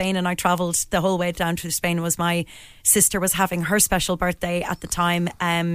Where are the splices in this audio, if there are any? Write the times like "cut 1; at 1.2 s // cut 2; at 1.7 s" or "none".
none

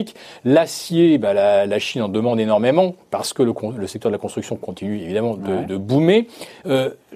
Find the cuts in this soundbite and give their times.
none

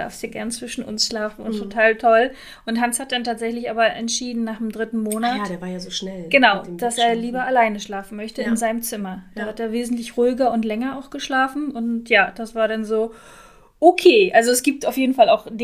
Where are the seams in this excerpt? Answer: none

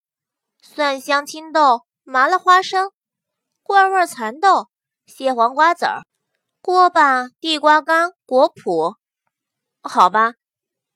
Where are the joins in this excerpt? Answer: none

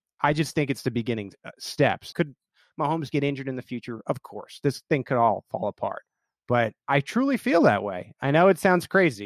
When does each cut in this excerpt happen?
cut 1; at 2.1 s

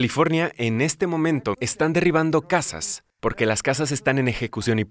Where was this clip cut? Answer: cut 1; at 1.5 s

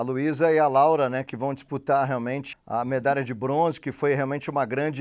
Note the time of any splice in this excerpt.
cut 1; at 2.5 s

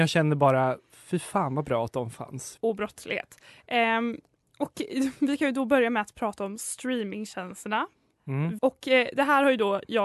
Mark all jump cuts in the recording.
cut 1; at 2.6 s // cut 2; at 8.6 s

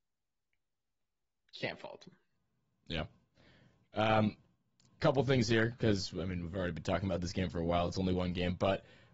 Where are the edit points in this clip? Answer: none

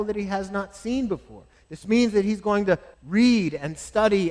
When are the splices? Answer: cut 1; at 1.6 s // cut 2; at 2.9 s

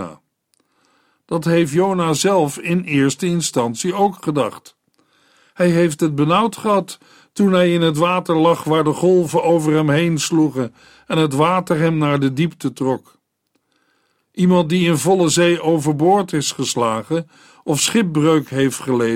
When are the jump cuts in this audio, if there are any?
none

